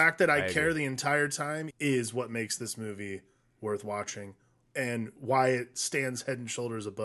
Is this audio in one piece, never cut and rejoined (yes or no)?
no